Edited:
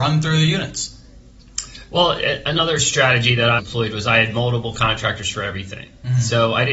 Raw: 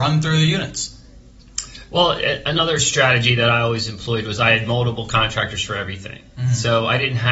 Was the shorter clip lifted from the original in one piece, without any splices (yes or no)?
no